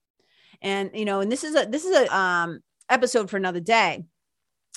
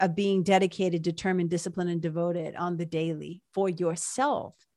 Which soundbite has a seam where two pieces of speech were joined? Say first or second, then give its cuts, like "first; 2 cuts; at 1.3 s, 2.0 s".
first; 1 cut; at 2.1 s